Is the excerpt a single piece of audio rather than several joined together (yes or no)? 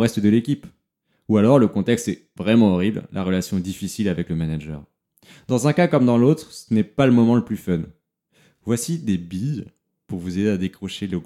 yes